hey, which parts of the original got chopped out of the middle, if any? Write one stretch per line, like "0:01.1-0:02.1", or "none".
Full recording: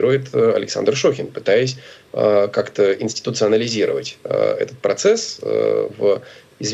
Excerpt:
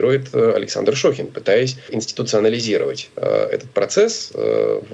0:01.9-0:03.0